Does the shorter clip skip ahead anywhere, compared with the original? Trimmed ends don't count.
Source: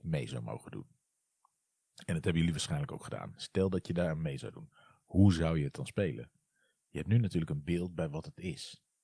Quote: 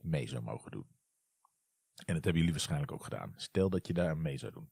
no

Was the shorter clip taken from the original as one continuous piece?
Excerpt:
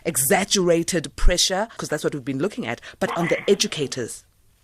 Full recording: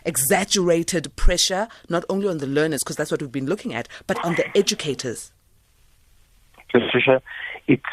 no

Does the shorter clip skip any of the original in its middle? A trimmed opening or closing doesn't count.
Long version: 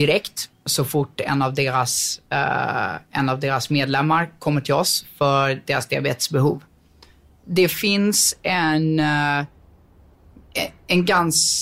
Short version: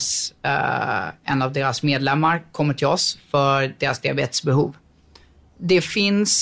no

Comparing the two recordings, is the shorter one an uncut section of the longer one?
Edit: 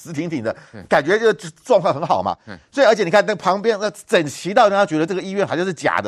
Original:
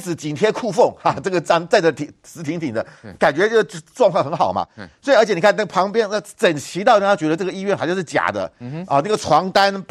yes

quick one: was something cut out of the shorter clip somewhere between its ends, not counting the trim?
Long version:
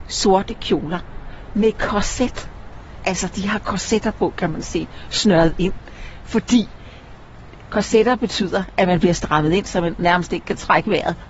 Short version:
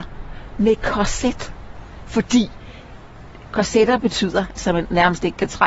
yes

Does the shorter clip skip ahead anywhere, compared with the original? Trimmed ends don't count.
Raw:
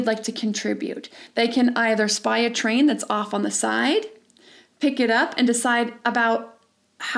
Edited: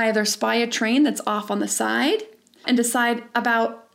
yes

